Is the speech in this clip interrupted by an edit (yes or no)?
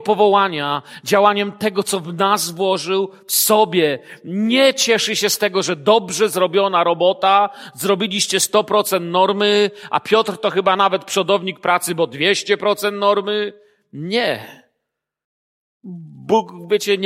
no